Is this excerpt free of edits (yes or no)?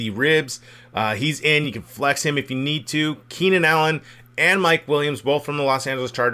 yes